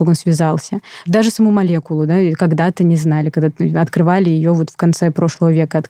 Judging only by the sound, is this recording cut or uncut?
uncut